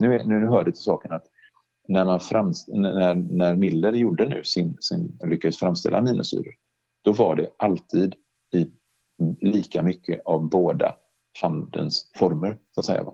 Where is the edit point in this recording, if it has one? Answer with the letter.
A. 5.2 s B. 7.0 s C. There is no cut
A